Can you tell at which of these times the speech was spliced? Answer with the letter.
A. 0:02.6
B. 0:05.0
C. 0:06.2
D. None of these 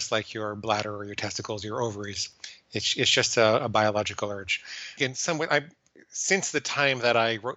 B